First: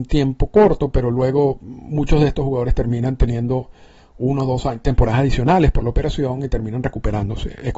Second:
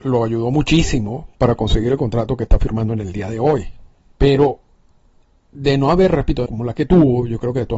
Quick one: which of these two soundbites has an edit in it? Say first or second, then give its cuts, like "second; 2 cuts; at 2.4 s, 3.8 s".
second; 2 cuts; at 4.1 s, 6.5 s